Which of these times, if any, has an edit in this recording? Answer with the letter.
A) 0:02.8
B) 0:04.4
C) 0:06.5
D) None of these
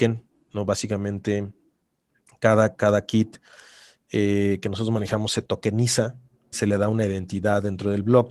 C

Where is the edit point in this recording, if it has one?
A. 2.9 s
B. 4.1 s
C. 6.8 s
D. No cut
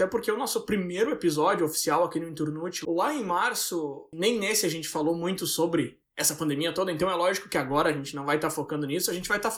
B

